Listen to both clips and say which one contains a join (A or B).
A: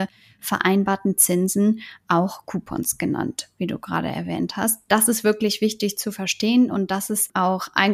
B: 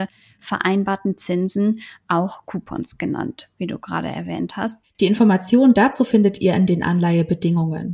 B